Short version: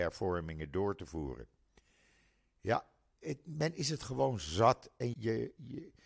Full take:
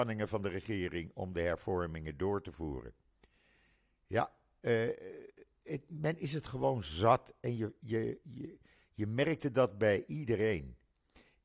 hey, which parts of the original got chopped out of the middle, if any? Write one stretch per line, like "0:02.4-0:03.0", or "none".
0:04.6-0:05.6
0:07.6-0:07.8